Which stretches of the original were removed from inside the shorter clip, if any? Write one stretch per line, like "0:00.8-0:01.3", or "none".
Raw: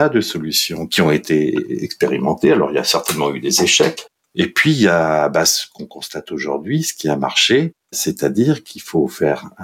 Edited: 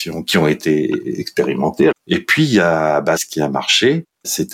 0:02.5-0:04.2
0:05.4-0:06.8